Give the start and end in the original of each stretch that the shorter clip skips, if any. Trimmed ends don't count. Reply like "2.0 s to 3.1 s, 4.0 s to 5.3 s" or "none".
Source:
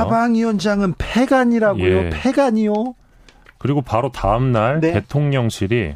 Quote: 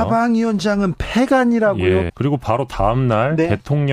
2.1 s to 3.5 s